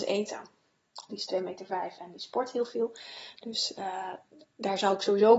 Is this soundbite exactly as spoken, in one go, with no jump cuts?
no; 1 cut; at 1.1 s

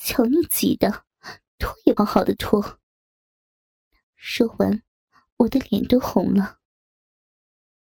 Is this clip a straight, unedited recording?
no; 1 cut; at 2.0 s

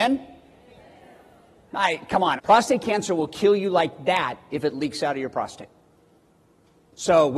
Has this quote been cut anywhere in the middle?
yes; 1 cut; at 2.4 s

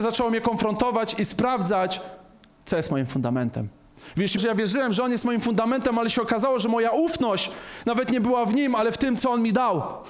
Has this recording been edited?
yes; 1 cut; at 4.4 s

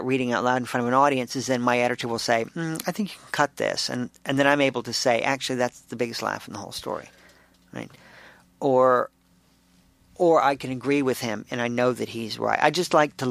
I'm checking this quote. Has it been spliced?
no; 0 cuts

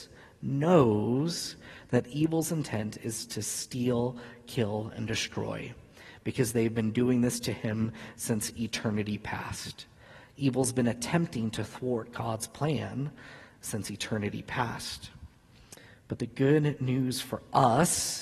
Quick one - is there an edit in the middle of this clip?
no; 0 cuts

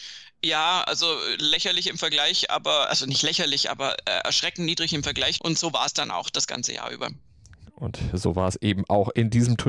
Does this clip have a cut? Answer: yes; 1 cut; at 5.4 s

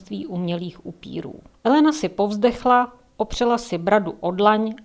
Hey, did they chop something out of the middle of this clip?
yes; 1 cut; at 1.5 s

